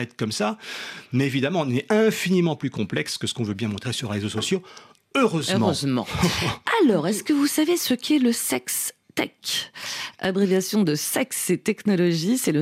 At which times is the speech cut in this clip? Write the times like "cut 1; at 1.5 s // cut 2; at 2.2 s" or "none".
none